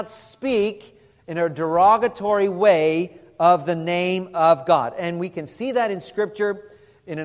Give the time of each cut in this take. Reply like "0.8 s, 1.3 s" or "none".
none